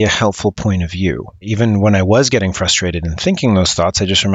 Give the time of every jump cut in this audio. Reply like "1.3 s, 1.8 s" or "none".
1.4 s